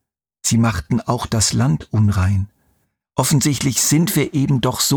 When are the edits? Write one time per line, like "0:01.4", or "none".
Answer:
0:03.0